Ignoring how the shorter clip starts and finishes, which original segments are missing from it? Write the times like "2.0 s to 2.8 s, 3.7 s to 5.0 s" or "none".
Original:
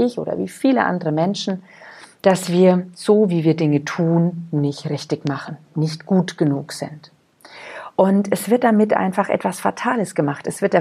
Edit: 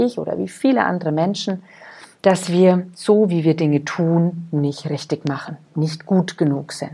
none